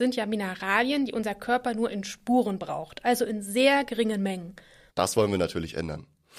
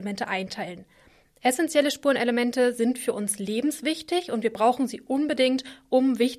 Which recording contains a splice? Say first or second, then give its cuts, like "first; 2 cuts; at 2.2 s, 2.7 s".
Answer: first; 1 cut; at 4.9 s